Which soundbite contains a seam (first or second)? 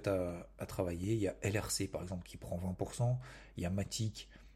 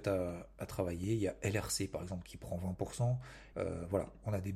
second